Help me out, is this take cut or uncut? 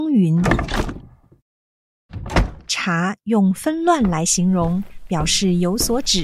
uncut